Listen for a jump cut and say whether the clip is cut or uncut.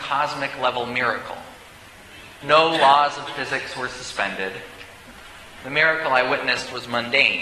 cut